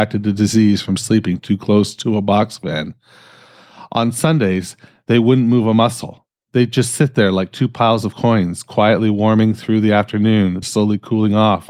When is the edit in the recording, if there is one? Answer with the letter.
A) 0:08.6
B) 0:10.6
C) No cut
B